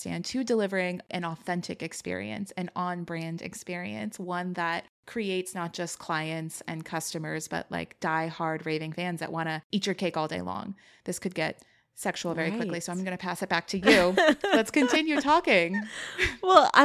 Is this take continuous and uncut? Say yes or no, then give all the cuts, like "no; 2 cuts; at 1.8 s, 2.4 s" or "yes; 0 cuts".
yes; 0 cuts